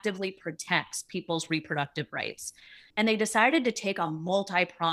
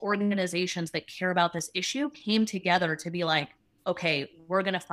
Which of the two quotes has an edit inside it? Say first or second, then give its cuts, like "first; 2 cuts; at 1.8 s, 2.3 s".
first; 1 cut; at 2.9 s